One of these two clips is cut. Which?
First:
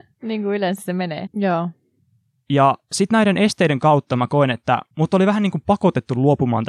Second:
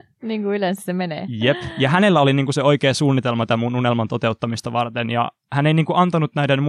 first; 2 cuts; at 1.3 s, 4.9 s

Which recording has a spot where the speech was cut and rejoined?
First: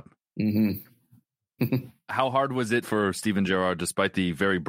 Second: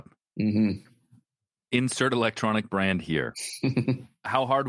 first; 2 cuts; at 1.6 s, 2.8 s

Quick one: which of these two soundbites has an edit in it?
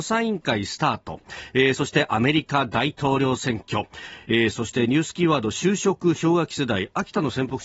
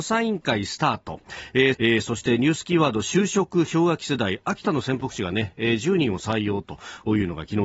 second; 1 cut; at 1.7 s

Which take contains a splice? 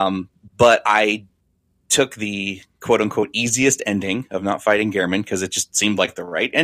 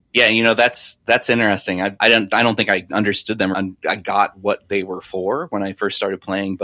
second; 2 cuts; at 2.0 s, 3.5 s

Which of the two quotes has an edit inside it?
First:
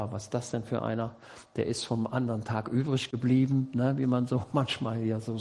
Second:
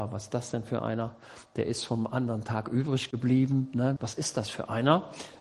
second; 1 cut; at 4.0 s

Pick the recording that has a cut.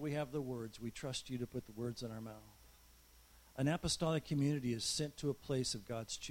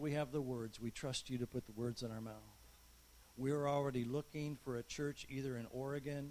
second; 1 cut; at 3.2 s

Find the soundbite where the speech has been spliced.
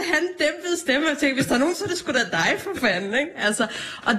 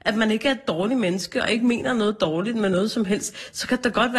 first; 1 cut; at 1.7 s

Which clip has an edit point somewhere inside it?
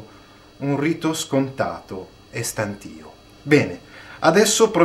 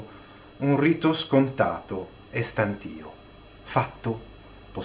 first; 1 cut; at 3.3 s

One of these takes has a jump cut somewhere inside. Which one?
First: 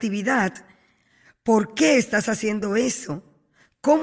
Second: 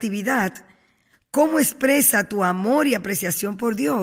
second; 1 cut; at 1.1 s

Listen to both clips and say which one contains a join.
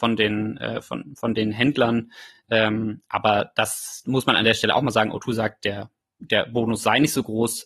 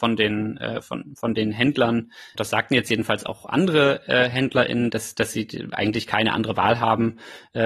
second; 2 cuts; at 2.3 s, 4.9 s

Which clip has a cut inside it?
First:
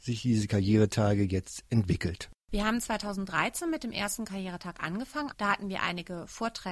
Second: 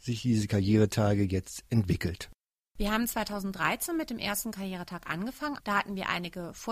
first; 1 cut; at 2.4 s

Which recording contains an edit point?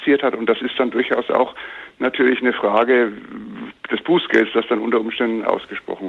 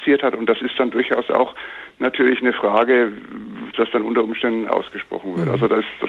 second; 1 cut; at 3.7 s

